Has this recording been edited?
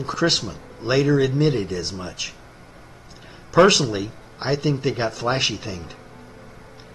no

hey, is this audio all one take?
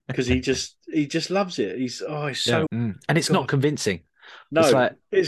no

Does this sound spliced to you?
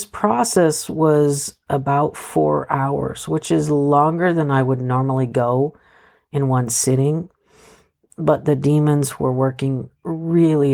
no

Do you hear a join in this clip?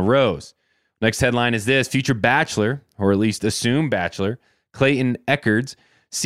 no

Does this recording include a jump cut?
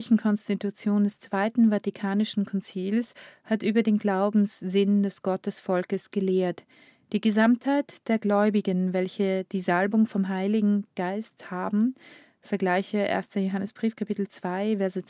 no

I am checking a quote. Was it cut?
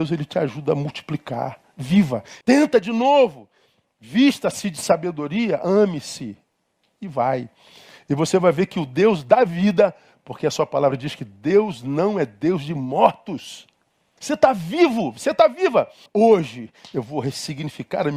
yes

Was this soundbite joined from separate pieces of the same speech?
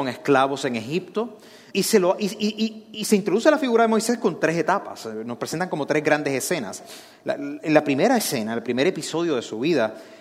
yes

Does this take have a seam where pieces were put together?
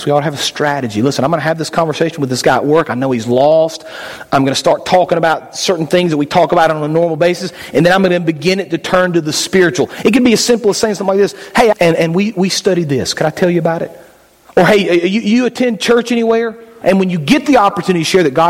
yes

